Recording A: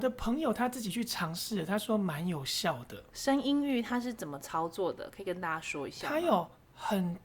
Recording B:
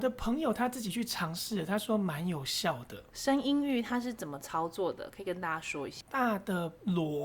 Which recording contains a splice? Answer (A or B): B